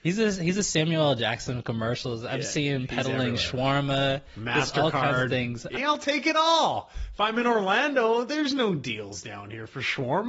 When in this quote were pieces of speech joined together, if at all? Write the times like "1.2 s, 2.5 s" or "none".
5.8 s